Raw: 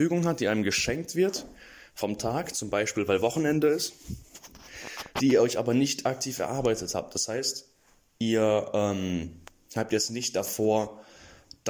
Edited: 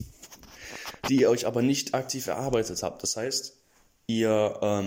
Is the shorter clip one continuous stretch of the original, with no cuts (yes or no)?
yes